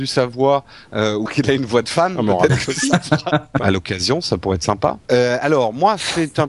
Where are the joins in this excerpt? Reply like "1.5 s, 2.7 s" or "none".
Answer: 1.3 s, 3.6 s, 5.1 s